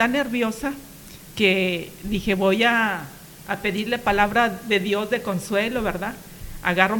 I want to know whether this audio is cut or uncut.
uncut